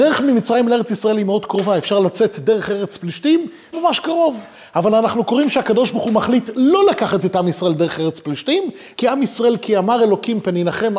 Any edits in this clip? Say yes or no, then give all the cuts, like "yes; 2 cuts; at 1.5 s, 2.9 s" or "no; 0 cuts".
yes; 2 cuts; at 3.7 s, 8.9 s